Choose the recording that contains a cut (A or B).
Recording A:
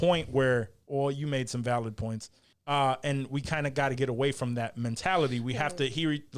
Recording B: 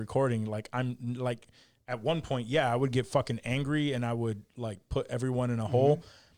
A